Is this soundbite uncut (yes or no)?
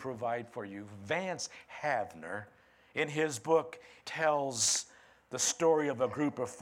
no